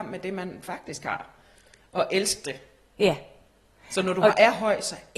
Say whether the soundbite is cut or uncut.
uncut